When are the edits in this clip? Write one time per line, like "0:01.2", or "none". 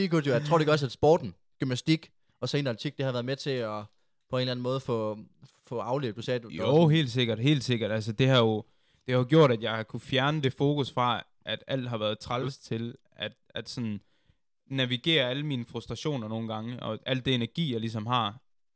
none